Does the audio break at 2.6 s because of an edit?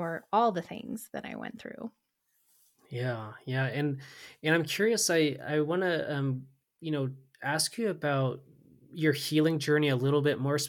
no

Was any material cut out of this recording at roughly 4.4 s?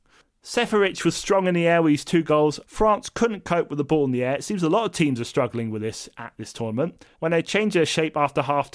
no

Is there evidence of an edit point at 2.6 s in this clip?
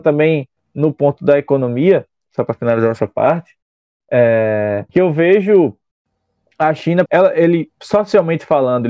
no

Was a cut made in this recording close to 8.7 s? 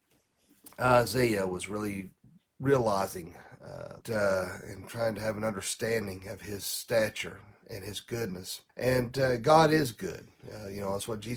yes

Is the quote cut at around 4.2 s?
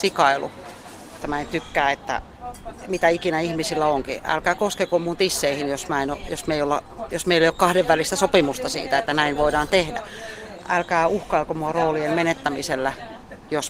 no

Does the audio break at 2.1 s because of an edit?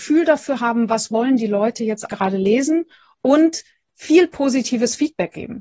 yes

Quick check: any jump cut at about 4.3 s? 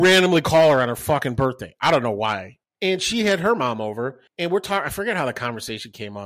yes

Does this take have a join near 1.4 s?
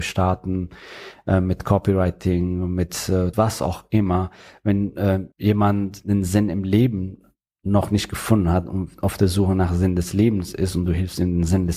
no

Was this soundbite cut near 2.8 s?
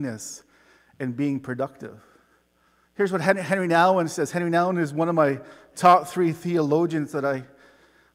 yes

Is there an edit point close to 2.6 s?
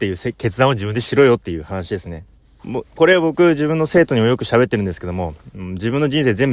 yes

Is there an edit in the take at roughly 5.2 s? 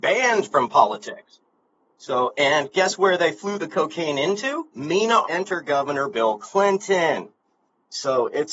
yes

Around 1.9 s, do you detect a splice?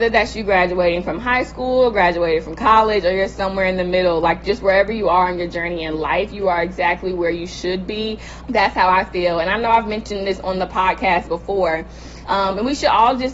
no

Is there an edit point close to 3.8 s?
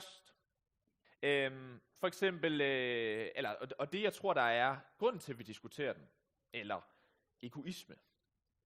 no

